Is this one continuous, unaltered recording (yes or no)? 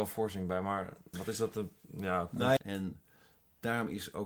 no